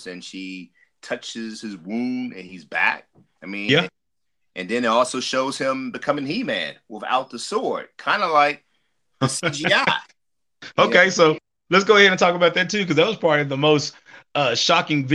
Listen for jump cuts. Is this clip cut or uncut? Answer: uncut